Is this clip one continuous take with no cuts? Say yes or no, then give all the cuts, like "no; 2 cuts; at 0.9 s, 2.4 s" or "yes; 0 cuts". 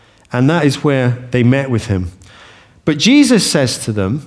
yes; 0 cuts